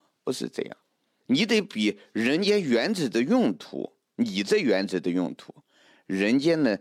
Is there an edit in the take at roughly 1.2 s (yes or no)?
yes